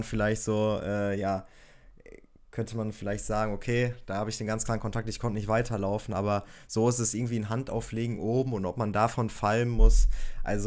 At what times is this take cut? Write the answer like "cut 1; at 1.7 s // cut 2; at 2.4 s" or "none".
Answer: none